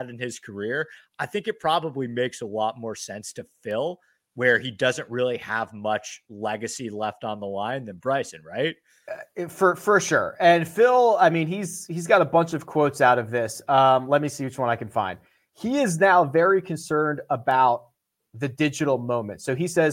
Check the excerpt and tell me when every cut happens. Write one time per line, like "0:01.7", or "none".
none